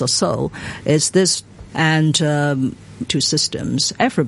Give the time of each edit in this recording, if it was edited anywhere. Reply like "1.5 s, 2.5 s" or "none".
1.7 s, 3.1 s